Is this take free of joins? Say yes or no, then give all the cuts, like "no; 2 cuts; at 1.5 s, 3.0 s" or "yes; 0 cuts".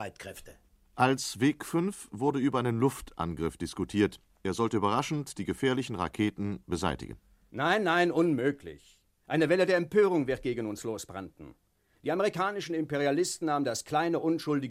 yes; 0 cuts